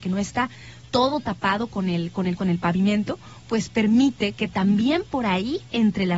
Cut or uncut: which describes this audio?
cut